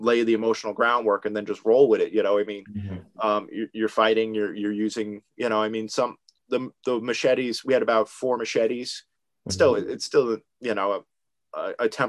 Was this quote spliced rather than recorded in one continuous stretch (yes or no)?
yes